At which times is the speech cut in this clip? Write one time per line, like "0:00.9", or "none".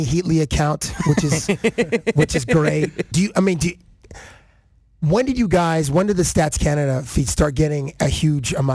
0:03.1